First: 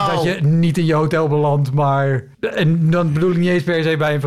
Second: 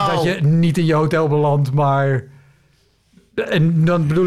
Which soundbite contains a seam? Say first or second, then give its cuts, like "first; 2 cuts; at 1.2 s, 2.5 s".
first; 1 cut; at 2.3 s